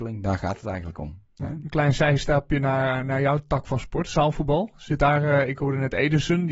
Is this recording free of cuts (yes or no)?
yes